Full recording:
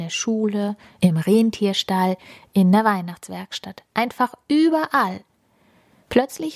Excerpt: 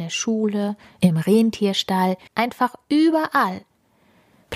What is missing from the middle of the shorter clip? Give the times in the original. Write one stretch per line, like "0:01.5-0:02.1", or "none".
0:02.3-0:03.9